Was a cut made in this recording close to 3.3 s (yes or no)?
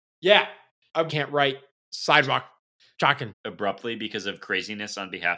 yes